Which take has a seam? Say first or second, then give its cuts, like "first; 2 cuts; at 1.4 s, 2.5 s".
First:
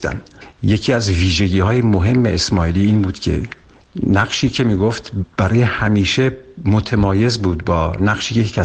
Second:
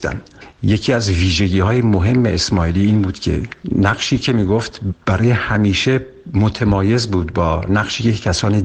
second; 1 cut; at 3.6 s